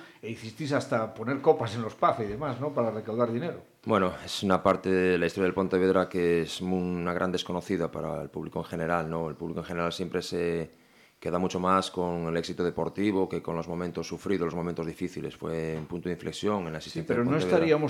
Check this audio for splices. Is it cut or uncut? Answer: uncut